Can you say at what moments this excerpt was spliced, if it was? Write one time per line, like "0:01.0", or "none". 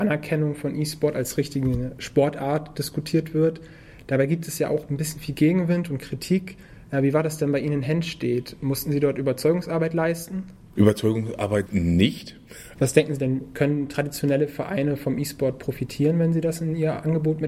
0:11.7
0:12.7